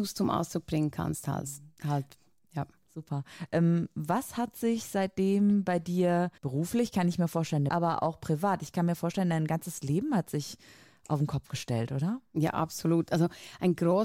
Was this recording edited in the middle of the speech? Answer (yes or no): yes